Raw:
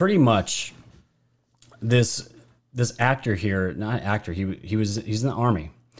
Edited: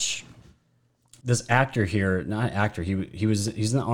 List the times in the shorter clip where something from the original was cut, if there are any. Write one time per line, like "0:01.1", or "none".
0:01.2